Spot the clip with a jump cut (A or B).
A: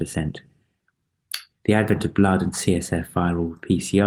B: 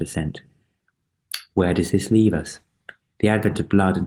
A